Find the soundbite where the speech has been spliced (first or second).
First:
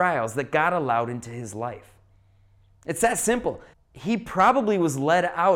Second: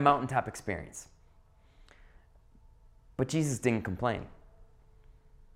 first